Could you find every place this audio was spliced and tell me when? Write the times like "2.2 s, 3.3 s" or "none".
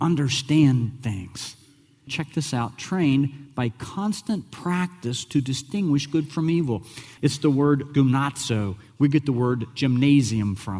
2.1 s, 7.2 s